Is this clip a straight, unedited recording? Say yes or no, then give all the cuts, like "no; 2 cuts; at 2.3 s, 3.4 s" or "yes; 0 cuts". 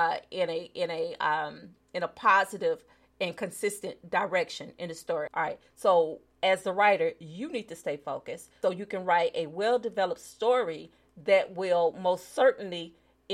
no; 2 cuts; at 5.3 s, 8.6 s